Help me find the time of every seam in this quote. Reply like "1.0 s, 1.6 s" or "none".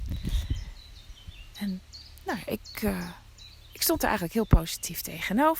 1.5 s